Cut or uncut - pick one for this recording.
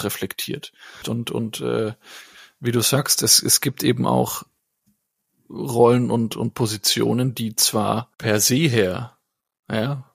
cut